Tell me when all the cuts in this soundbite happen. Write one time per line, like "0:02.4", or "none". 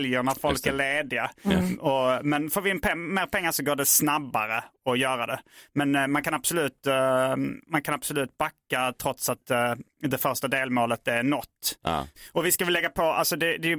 none